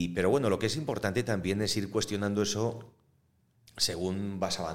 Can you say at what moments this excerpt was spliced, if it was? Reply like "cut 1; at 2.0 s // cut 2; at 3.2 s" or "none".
none